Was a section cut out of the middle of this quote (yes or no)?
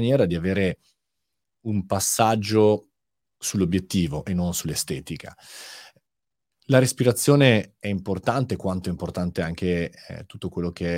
no